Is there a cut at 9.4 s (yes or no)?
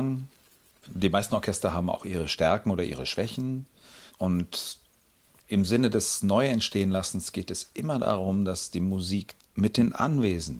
yes